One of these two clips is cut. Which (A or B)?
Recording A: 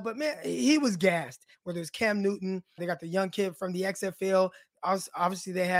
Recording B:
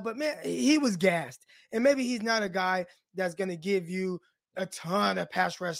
A